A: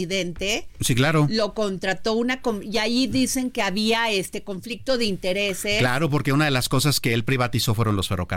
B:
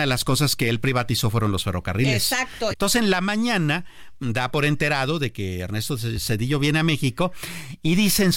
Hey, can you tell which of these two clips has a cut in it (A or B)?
B